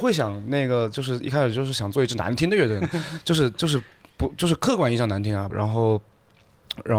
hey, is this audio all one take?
no; 1 cut; at 5.5 s

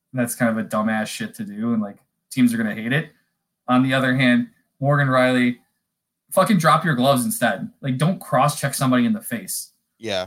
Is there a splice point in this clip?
no; 0 cuts

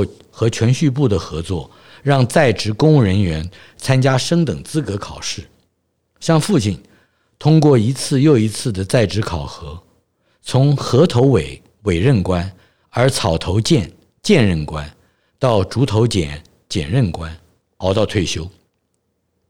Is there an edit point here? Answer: no; 0 cuts

